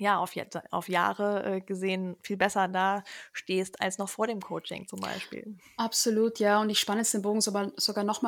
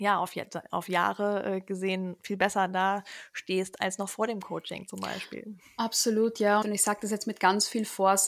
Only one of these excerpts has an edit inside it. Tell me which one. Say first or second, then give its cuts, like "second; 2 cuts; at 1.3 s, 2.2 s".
second; 1 cut; at 6.6 s